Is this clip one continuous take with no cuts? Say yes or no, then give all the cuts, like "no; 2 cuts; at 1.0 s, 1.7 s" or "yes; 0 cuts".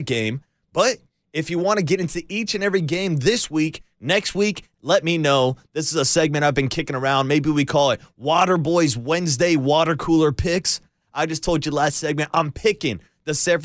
no; 2 cuts; at 4.7 s, 11.0 s